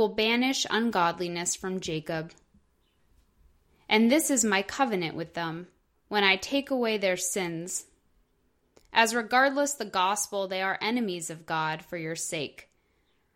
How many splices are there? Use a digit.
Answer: 0